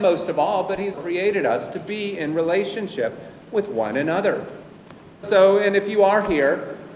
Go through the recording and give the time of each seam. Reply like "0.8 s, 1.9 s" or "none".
0.9 s, 5.2 s